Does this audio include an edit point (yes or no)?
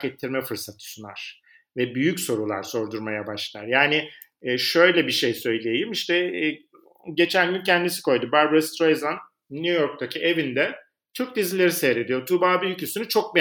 no